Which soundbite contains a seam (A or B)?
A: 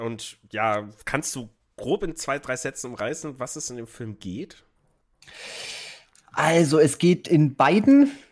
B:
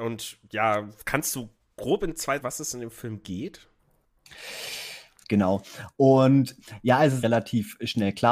B